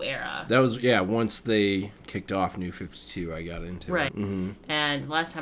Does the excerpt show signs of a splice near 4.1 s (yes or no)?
yes